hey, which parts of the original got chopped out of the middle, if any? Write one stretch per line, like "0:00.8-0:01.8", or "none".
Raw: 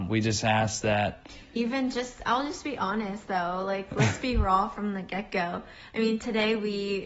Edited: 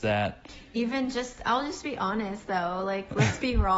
none